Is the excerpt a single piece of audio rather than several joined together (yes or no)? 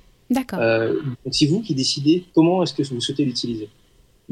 no